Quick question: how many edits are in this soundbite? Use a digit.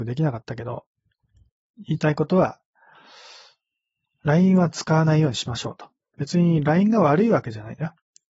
0